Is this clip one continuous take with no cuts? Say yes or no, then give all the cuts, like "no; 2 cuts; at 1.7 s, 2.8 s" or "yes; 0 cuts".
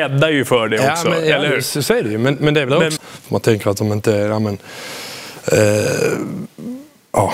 no; 1 cut; at 3.0 s